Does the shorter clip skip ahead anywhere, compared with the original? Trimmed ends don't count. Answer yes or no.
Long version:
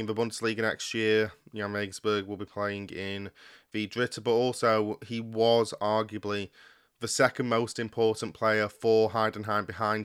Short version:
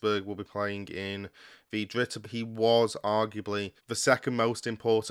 yes